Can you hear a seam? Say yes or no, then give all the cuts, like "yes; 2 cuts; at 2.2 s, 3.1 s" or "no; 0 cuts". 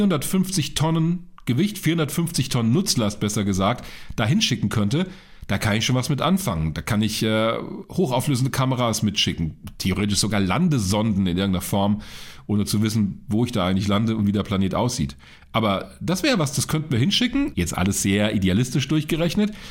yes; 1 cut; at 17.5 s